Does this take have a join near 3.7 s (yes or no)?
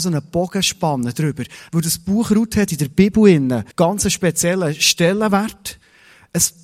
yes